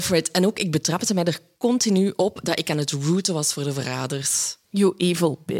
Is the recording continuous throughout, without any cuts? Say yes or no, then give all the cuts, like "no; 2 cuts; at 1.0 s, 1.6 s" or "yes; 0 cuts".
no; 1 cut; at 4.6 s